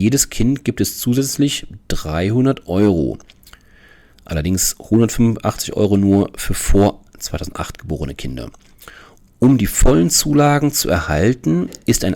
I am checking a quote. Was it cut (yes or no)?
no